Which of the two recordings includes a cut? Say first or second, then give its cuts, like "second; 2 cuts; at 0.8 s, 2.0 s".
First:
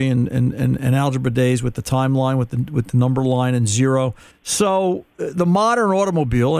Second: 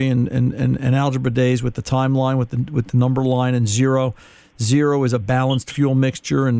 first; 1 cut; at 4.3 s